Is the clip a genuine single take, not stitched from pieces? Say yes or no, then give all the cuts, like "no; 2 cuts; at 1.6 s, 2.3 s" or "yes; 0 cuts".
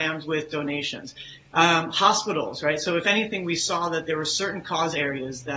yes; 0 cuts